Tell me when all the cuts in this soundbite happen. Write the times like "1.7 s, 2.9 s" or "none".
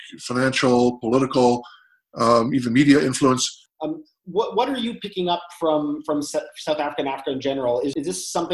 3.7 s